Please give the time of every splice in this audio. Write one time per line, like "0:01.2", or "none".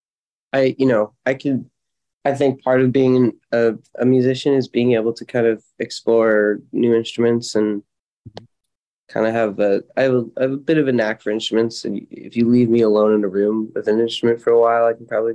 none